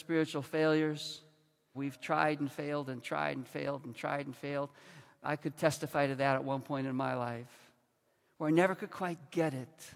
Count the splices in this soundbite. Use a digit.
1